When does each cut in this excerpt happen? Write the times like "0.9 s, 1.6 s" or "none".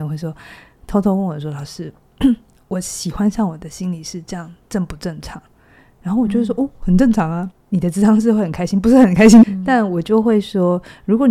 7.5 s, 9.4 s